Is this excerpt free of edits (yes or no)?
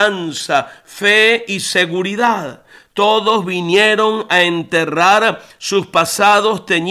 yes